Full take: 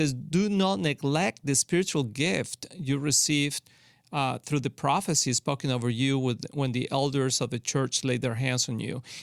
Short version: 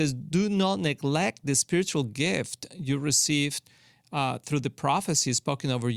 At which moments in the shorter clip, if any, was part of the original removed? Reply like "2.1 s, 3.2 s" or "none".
none